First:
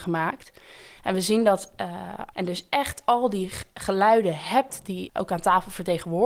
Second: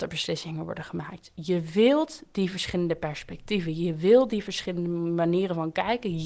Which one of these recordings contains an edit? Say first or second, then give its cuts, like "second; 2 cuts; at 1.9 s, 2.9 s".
first; 2 cuts; at 1.0 s, 2.3 s